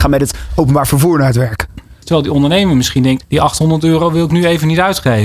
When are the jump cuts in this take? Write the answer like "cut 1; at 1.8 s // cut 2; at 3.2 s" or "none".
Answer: cut 1; at 2.0 s // cut 2; at 3.2 s